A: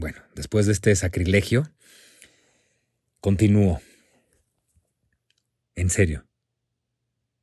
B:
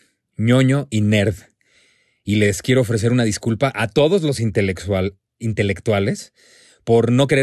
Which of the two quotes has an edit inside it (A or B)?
A